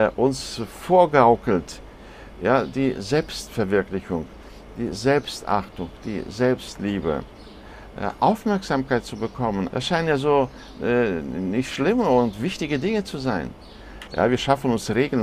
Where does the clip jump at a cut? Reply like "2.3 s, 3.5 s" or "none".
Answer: 9.7 s, 14.1 s